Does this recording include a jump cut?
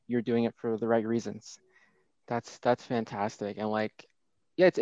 yes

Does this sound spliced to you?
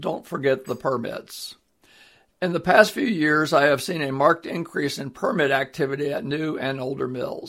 no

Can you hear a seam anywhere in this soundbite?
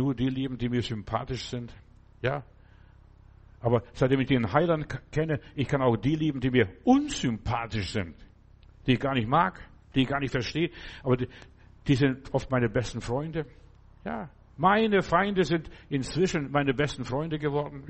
no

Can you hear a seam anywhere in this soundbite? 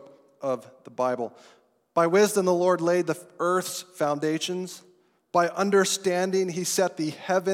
no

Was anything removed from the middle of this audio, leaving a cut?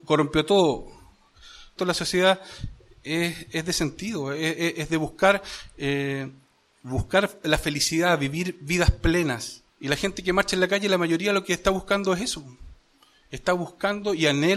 yes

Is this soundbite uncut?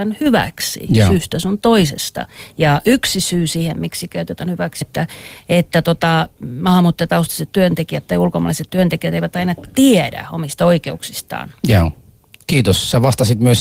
no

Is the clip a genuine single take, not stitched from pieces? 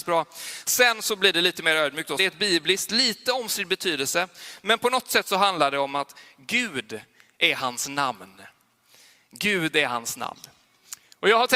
no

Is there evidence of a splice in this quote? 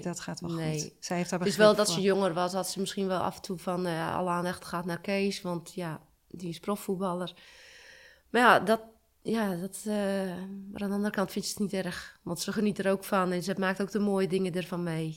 no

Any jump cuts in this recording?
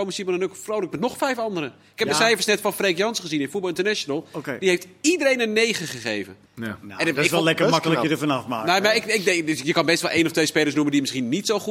yes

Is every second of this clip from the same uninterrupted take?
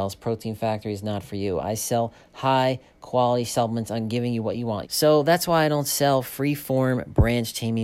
no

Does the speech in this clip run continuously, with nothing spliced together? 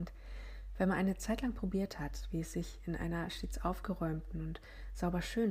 yes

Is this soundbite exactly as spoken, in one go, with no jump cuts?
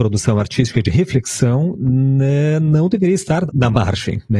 no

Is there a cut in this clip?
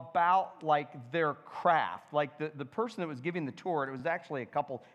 no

